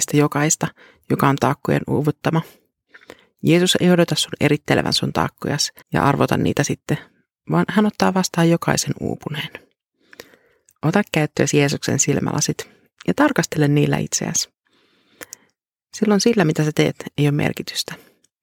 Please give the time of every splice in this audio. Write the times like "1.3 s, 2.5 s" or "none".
5.8 s